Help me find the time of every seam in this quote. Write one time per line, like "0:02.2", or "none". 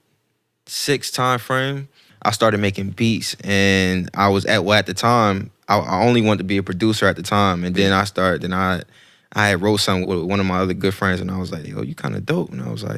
0:10.0
0:11.6